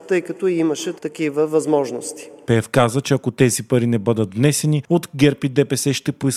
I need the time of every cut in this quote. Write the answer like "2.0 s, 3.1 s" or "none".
1.0 s, 2.5 s